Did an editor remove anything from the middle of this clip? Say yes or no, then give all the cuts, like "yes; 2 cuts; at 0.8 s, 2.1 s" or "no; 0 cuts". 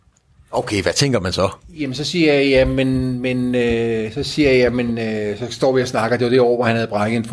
no; 0 cuts